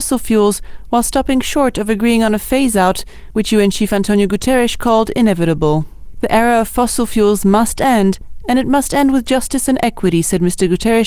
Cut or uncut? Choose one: uncut